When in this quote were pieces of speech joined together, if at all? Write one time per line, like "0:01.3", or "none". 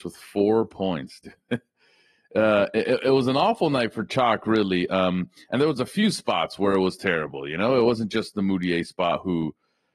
none